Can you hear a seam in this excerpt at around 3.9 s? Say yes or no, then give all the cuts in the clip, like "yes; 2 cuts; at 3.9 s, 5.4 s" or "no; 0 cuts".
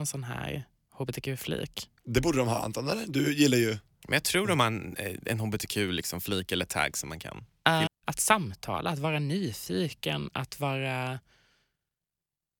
no; 2 cuts; at 2.0 s, 7.9 s